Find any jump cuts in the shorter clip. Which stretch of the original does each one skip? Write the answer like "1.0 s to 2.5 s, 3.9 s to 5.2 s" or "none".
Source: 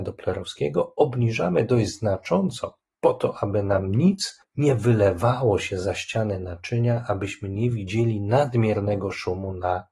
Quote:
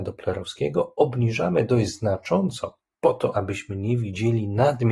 3.3 s to 7.1 s